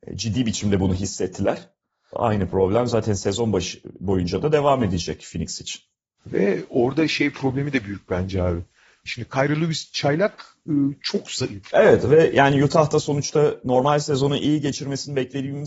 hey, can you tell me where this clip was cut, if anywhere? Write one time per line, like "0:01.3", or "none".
0:09.1
0:11.7